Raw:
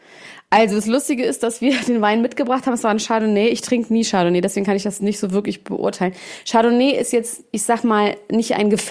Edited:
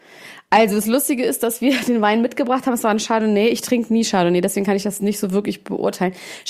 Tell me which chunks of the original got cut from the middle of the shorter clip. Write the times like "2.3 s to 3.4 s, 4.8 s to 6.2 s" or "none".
none